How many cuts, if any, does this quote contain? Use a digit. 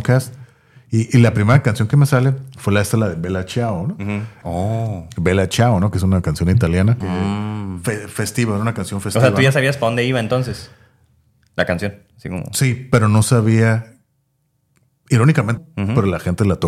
3